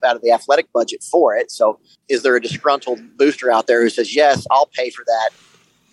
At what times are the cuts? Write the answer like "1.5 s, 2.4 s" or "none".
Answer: none